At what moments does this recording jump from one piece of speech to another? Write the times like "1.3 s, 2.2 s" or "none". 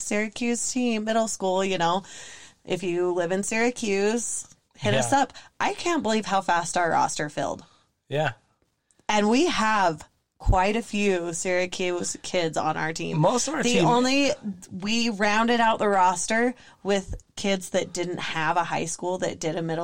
none